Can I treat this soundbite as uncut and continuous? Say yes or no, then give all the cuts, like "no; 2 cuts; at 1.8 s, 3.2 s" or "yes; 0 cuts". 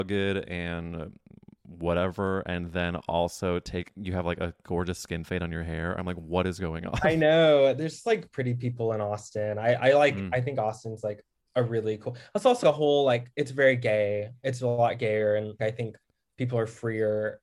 no; 2 cuts; at 12.6 s, 15.6 s